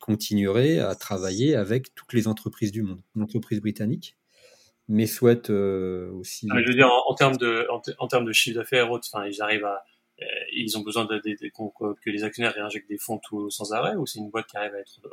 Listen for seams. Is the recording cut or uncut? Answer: cut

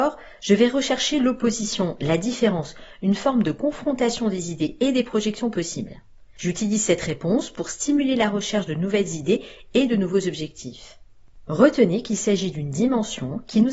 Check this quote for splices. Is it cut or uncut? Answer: uncut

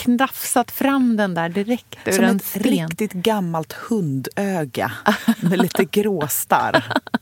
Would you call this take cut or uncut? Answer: uncut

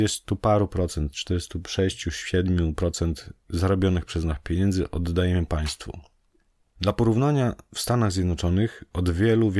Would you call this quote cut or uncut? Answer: uncut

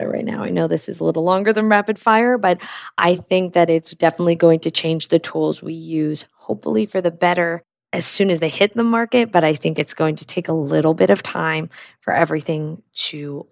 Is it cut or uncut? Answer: uncut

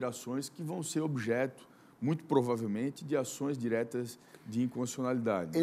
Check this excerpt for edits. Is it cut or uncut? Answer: uncut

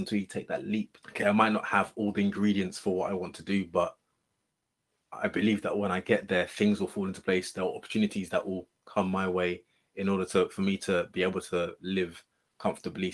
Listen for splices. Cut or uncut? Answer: cut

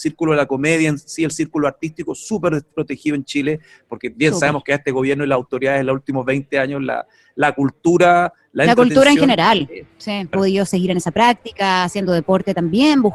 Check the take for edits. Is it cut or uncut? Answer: cut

